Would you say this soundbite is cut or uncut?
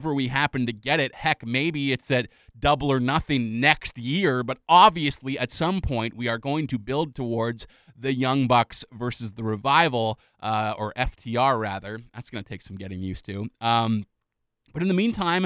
uncut